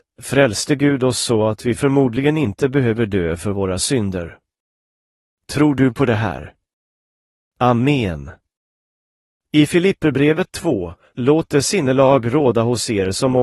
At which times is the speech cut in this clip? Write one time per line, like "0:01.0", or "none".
none

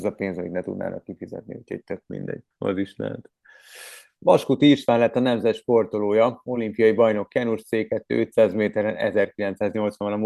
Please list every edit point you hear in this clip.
0:02.5

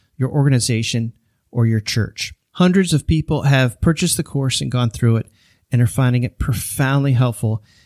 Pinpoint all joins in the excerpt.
none

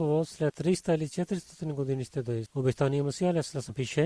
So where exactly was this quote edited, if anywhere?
0:02.5

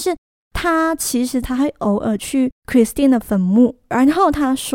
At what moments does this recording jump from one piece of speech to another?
0:01.4
0:02.6

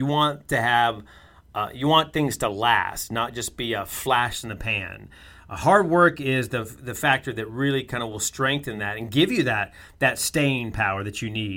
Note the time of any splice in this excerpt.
none

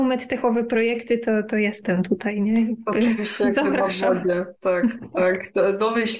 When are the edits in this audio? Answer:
none

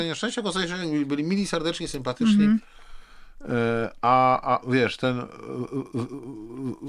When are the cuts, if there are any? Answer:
0:04.6

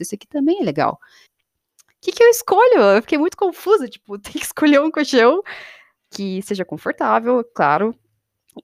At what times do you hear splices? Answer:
0:01.3

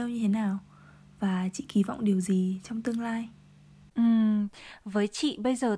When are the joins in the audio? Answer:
none

